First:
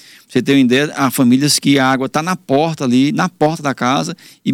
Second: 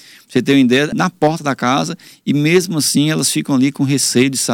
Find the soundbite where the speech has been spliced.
second; 1 cut; at 0.9 s

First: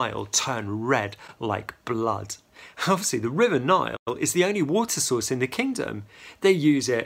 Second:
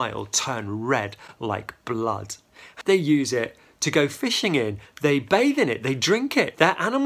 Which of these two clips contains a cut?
second; 2 cuts; at 2.8 s, 4.9 s

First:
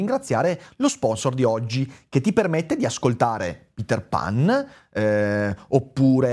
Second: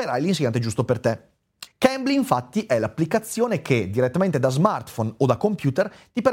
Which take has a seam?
second; 1 cut; at 1.7 s

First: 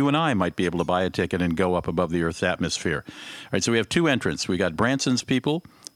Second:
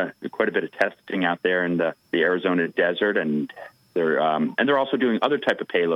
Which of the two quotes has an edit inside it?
second; 1 cut; at 2.0 s

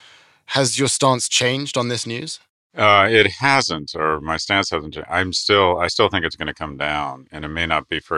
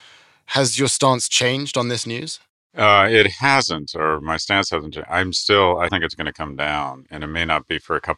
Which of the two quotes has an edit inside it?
second; 1 cut; at 5.9 s

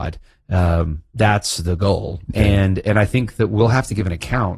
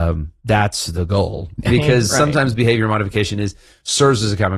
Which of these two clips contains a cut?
second; 1 cut; at 1.7 s

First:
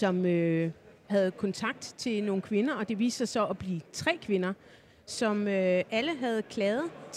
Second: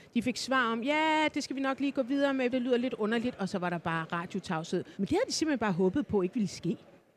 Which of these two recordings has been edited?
second; 2 cuts; at 2.5 s, 4.9 s

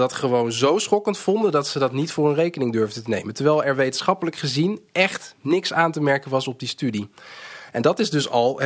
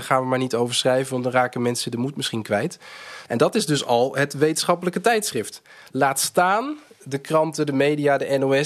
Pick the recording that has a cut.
second; 1 cut; at 3.2 s

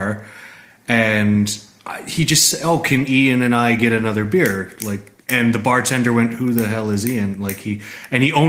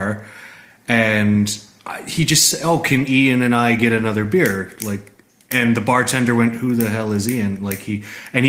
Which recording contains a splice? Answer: first; 1 cut; at 5.2 s

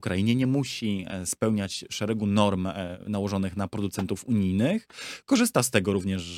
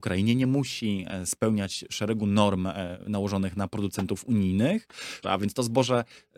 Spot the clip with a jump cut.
second; 1 cut; at 5.2 s

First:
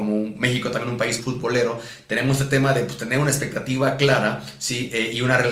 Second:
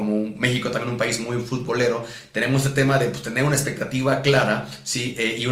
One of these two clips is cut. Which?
first; 1 cut; at 1.2 s

